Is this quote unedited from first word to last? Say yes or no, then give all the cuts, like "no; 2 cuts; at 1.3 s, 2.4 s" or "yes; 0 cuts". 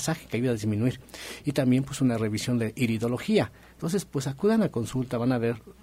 yes; 0 cuts